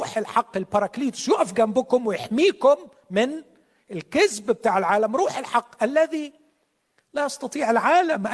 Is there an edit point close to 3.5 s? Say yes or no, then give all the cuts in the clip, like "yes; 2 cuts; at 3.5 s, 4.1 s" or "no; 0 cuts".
no; 0 cuts